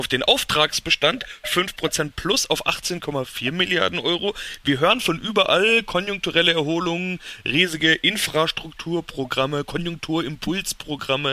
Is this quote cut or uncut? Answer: uncut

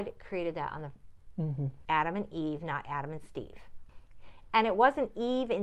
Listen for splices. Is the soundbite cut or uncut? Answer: cut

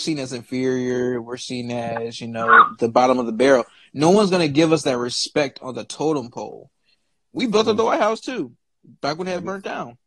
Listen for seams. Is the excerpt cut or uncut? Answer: cut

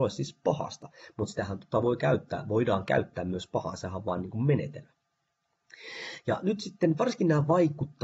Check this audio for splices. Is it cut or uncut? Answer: uncut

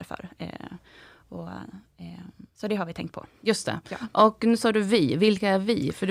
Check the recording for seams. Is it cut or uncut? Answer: uncut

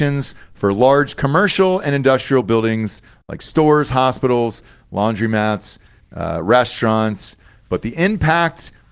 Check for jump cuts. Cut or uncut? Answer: uncut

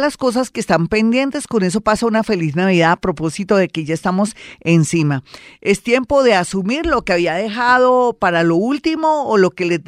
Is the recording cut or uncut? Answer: uncut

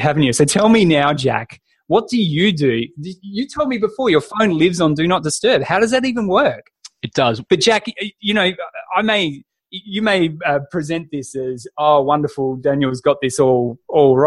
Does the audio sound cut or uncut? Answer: cut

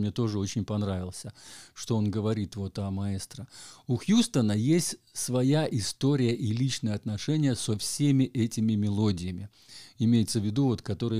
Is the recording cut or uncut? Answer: uncut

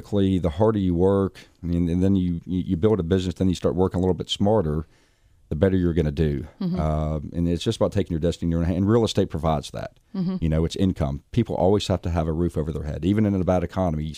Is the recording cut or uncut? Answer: uncut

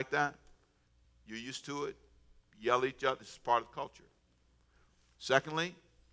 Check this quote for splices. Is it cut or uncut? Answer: uncut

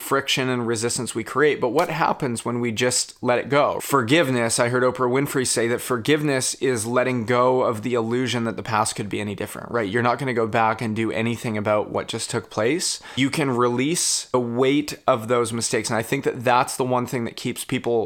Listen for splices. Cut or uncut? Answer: uncut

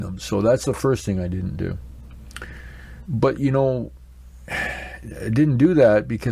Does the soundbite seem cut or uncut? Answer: cut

